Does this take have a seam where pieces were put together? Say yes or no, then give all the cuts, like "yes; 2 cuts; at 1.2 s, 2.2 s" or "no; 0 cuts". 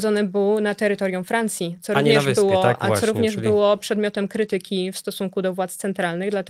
no; 0 cuts